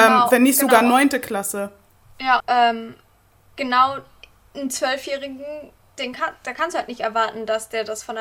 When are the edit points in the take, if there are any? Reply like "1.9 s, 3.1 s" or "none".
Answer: 2.4 s